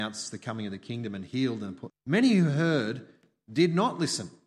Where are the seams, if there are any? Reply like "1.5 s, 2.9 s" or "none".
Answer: 1.9 s